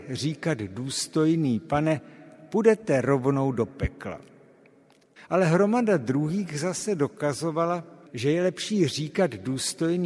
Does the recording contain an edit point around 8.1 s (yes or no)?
yes